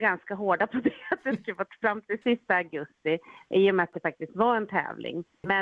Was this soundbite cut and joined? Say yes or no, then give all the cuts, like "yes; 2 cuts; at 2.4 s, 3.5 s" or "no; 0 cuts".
yes; 1 cut; at 2.2 s